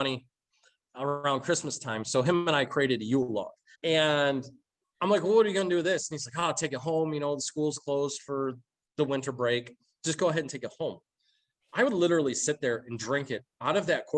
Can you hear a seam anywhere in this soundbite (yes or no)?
yes